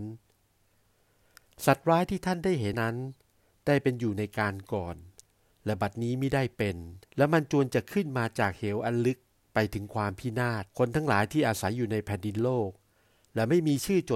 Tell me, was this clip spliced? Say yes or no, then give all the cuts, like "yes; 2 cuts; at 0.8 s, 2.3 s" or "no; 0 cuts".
yes; 3 cuts; at 2.7 s, 7.1 s, 10.7 s